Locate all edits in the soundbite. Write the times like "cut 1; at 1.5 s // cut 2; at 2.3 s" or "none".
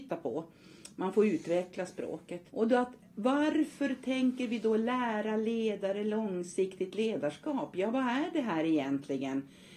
cut 1; at 2.5 s